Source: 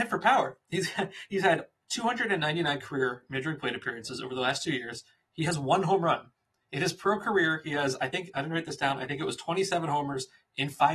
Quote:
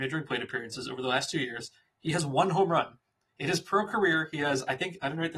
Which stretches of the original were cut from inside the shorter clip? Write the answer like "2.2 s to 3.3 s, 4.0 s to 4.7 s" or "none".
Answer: none

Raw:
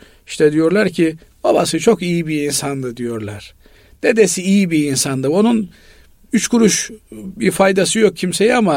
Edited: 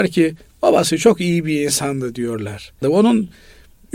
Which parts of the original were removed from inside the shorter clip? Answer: 3.6 s to 5.2 s

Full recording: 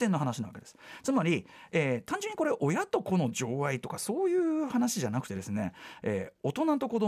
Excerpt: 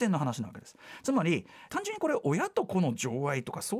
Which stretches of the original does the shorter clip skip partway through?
1.7 s to 2.0 s

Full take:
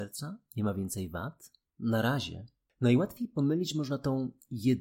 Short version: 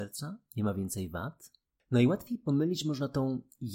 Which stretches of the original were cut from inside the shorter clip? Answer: 1.7 s to 2.6 s

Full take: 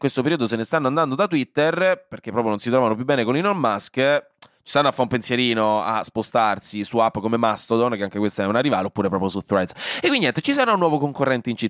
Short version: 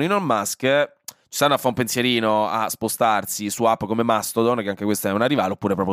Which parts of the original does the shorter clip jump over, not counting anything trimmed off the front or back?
none

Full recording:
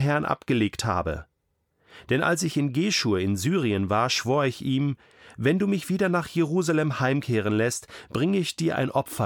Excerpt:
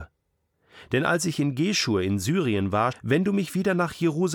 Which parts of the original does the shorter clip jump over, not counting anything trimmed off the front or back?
4.1 s to 5.3 s

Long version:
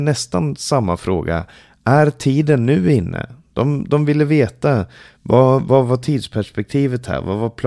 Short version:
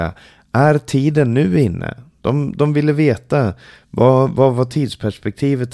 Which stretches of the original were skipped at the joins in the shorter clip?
none

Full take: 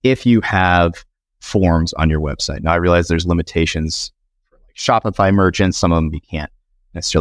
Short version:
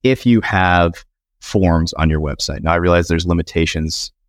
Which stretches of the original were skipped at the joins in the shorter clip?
none

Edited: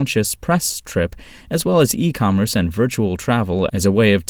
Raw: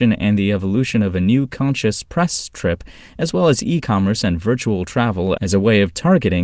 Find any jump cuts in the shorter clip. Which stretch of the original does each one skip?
none

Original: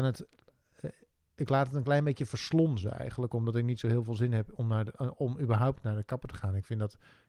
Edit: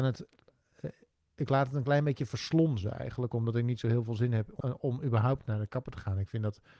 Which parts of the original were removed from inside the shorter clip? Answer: 4.6 s to 5.0 s

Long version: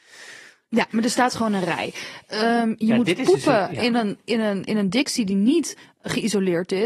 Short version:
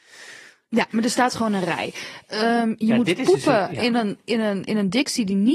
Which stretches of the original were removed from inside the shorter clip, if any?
none

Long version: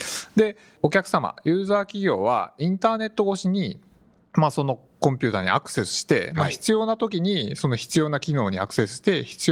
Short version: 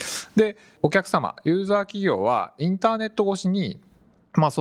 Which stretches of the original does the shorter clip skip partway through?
none

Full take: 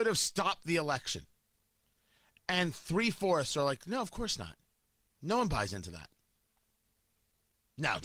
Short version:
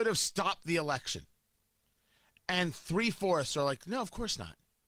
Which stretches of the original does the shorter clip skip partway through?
none

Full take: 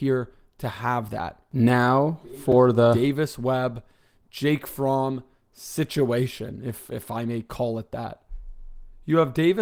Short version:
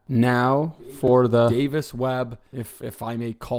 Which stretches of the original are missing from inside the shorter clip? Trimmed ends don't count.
4.0 s to 6.6 s

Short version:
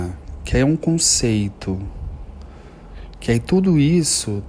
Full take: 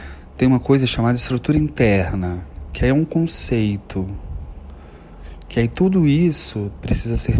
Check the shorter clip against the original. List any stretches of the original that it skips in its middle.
none

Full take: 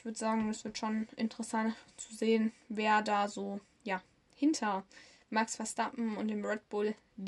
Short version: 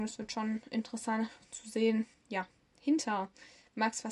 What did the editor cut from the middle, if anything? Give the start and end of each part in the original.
2.6 s to 3.7 s

